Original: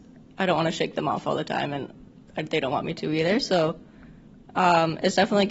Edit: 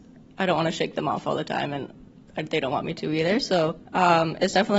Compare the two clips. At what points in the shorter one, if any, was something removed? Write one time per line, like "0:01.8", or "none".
0:03.9